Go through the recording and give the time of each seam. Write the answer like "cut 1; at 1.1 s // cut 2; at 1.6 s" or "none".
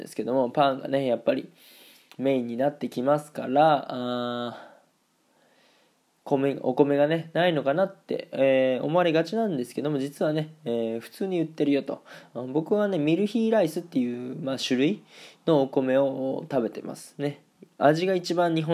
none